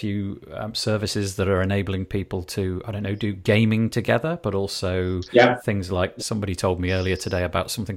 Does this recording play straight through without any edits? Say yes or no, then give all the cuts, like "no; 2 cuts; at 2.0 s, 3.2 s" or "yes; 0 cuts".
no; 1 cut; at 6.2 s